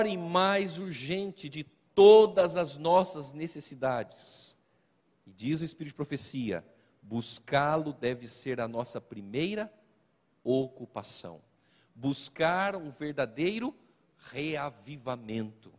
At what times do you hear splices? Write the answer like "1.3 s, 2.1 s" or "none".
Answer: none

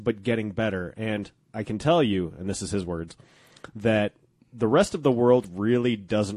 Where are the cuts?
none

